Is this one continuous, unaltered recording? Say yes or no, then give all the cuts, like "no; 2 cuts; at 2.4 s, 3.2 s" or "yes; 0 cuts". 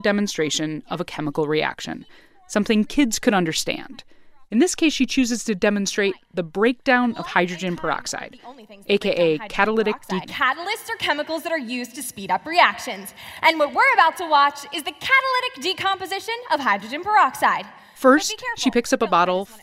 no; 1 cut; at 10.2 s